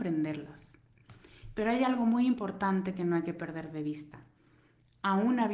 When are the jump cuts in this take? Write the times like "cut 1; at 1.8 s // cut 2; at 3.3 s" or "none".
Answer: none